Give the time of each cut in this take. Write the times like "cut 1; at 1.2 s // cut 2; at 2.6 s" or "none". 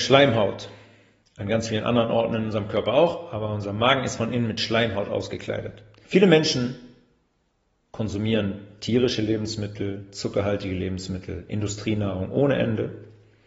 cut 1; at 6.0 s

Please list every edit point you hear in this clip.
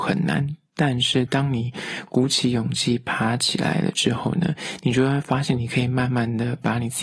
none

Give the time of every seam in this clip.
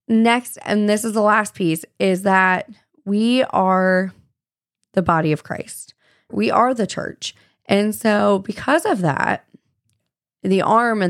none

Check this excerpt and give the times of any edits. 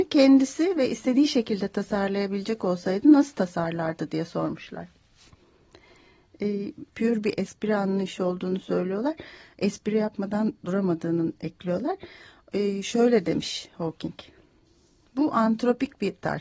cut 1; at 6.9 s

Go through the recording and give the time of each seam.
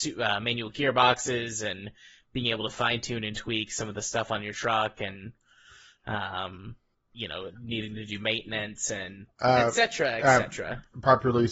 none

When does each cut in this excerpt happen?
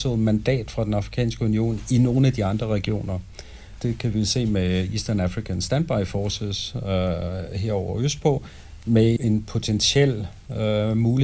cut 1; at 3.8 s // cut 2; at 9.2 s

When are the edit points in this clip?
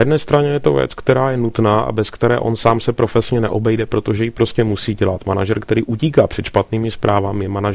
none

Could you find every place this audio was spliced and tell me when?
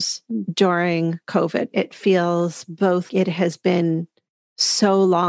cut 1; at 1.7 s // cut 2; at 3.1 s

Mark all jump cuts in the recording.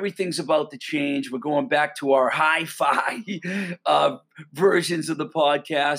none

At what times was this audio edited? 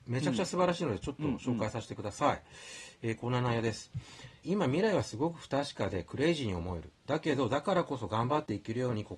cut 1; at 4.4 s // cut 2; at 7.0 s

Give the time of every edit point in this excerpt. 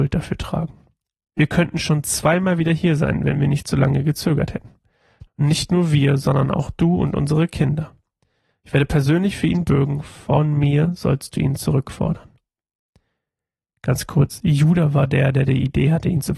cut 1; at 5.3 s

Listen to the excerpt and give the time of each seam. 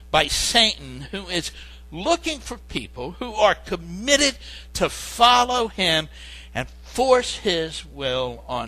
none

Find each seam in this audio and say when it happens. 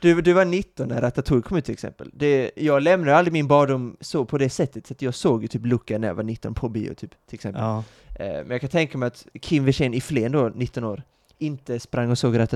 none

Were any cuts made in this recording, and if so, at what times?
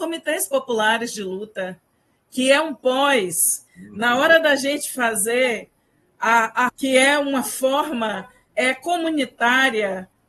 cut 1; at 3.7 s // cut 2; at 6.7 s

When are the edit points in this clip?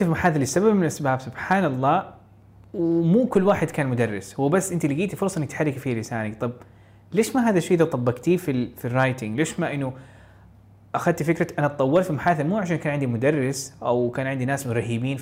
none

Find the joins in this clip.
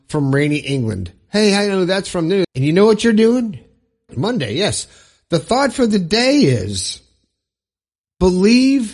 cut 1; at 2.4 s // cut 2; at 4.1 s

